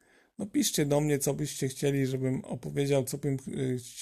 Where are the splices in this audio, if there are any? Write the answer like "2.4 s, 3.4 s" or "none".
none